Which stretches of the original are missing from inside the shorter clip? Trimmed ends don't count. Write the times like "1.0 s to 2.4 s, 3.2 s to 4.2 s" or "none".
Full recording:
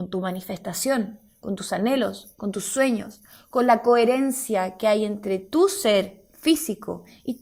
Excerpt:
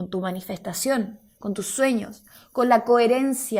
1.4 s to 2.4 s